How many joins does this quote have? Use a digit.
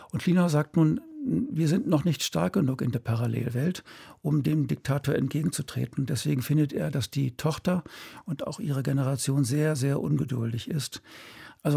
0